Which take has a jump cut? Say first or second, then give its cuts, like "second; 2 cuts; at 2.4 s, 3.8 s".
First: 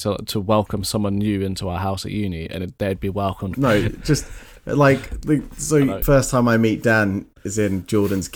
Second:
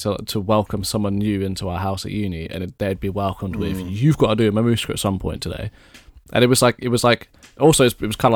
first; 2 cuts; at 3.5 s, 6.0 s